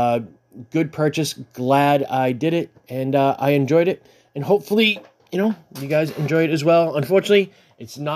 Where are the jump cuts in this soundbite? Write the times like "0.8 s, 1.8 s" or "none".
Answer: none